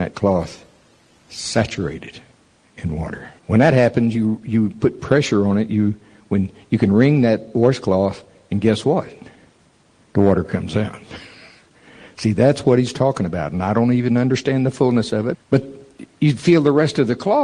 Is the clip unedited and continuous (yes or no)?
no